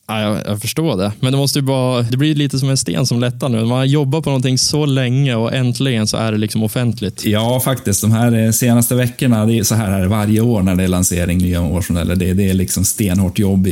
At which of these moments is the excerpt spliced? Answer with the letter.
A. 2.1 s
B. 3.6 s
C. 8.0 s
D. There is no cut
A